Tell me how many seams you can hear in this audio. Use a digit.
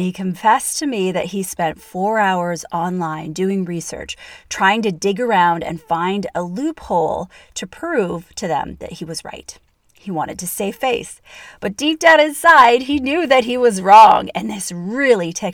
0